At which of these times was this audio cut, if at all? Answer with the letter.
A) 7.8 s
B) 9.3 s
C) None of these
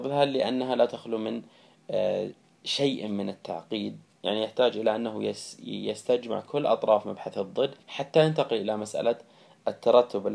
A